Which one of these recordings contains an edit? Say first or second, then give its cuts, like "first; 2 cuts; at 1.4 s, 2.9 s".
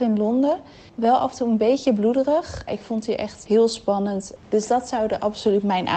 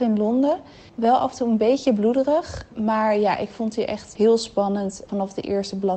first; 2 cuts; at 2.7 s, 4.4 s